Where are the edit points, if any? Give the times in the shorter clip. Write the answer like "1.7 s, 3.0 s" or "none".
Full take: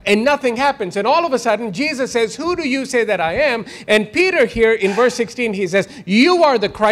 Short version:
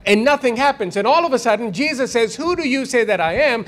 none